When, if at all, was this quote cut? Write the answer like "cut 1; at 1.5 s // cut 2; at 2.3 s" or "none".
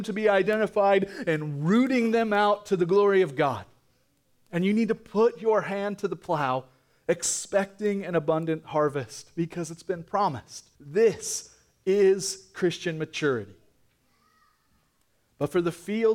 cut 1; at 10.8 s